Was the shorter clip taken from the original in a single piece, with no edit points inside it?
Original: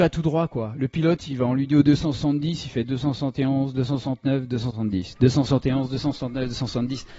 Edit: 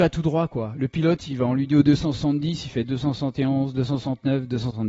yes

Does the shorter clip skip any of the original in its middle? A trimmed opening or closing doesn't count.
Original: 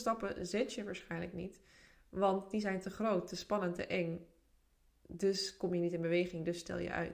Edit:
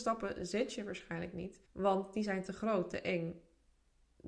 yes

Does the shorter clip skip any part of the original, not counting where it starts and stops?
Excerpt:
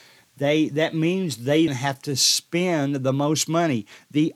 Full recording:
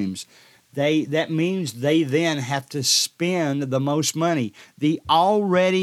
yes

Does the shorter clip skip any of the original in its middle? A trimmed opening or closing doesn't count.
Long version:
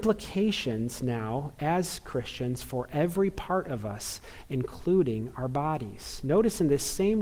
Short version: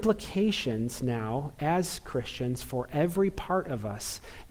no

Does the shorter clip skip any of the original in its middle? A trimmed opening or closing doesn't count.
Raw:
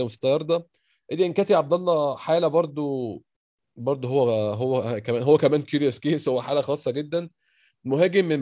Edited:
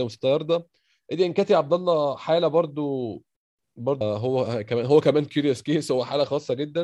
yes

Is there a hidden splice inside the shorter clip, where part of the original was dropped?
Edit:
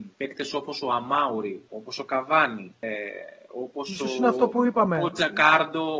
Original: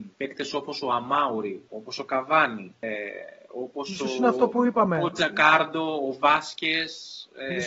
no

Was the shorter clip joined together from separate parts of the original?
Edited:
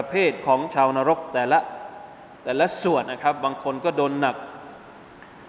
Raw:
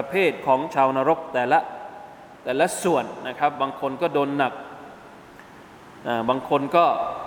yes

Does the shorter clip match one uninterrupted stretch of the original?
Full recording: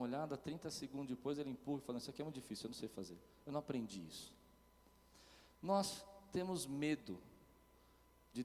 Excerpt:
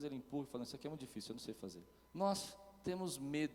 no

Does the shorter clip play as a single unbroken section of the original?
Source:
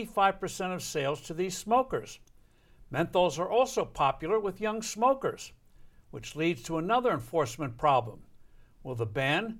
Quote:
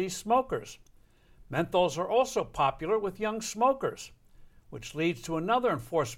yes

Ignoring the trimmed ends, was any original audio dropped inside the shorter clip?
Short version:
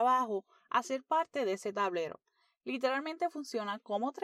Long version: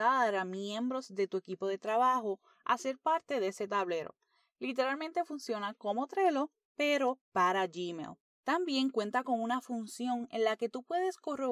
no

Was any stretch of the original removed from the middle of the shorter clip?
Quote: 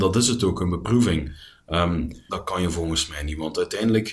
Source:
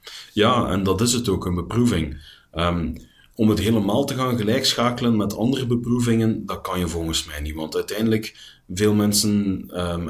yes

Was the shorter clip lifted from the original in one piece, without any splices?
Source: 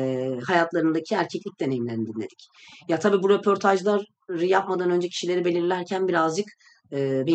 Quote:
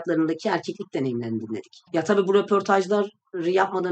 no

